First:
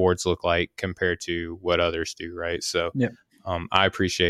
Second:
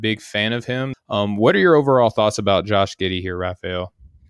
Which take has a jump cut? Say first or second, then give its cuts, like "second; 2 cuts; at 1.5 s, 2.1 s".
second; 1 cut; at 0.9 s